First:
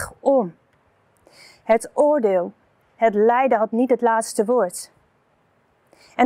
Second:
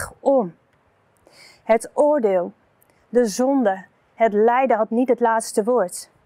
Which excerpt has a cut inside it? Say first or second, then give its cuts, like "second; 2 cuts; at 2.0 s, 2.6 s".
first; 1 cut; at 2.8 s